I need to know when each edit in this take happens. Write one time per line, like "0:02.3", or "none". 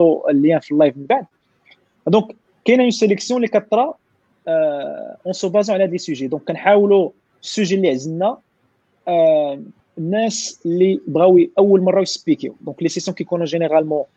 0:09.8

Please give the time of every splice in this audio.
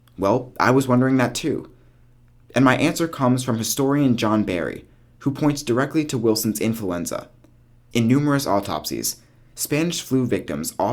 none

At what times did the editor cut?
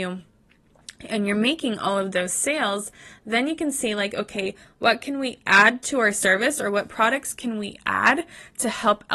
none

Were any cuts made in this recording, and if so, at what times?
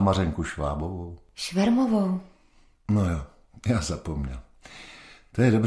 none

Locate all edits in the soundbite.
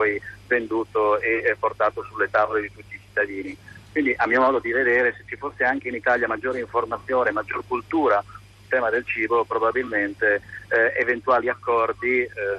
none

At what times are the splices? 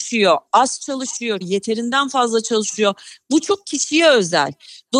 0:01.4

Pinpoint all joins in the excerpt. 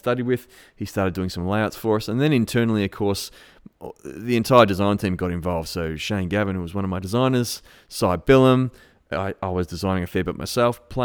none

